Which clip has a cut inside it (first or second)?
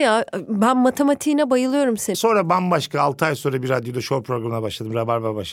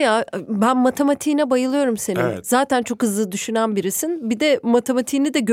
first